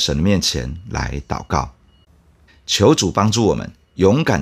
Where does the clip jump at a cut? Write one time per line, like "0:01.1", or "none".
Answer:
0:02.5